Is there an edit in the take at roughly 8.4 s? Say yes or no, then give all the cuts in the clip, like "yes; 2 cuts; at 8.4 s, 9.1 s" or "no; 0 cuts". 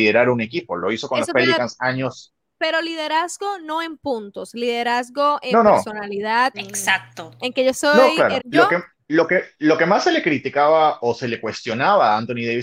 yes; 2 cuts; at 6.5 s, 8.4 s